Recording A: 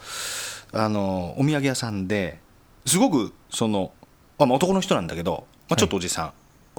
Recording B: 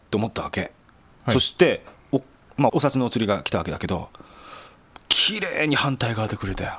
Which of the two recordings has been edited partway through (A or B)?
B